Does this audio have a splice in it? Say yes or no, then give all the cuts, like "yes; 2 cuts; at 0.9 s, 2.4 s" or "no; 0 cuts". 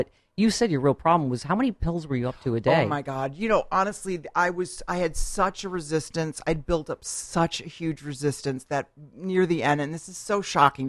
no; 0 cuts